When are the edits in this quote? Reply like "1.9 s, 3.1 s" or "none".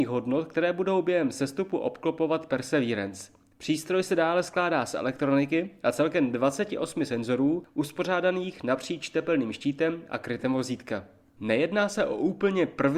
none